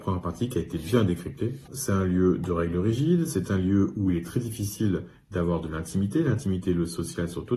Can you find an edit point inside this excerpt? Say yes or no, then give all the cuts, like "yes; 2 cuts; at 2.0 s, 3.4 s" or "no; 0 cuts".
yes; 1 cut; at 1.7 s